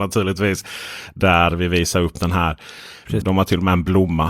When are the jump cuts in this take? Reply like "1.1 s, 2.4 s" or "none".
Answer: 3.2 s